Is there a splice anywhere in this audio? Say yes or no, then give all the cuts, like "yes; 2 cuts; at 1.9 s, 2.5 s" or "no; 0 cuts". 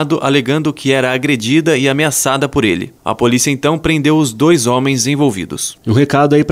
no; 0 cuts